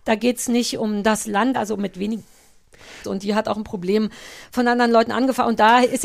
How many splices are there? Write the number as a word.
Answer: two